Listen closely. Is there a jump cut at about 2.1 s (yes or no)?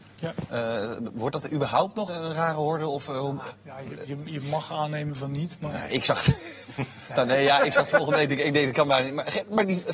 yes